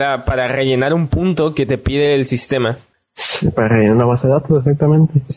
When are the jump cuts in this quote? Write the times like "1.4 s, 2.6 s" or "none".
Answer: none